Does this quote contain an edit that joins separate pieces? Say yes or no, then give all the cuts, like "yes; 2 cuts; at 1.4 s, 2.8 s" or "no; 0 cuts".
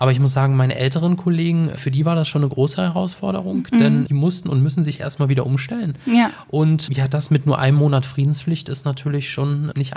no; 0 cuts